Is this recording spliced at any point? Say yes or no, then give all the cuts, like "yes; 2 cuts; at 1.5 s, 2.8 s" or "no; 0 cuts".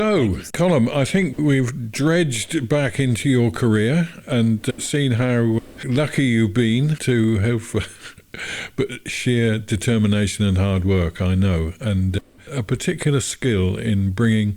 no; 0 cuts